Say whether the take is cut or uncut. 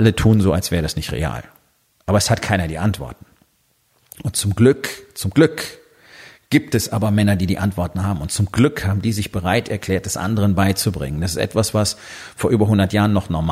uncut